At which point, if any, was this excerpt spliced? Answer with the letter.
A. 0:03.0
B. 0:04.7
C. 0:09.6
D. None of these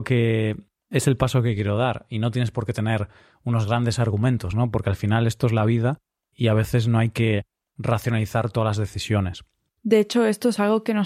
D